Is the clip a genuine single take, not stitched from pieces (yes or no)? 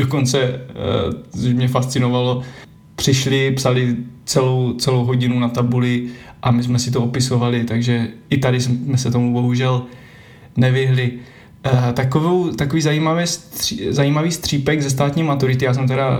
yes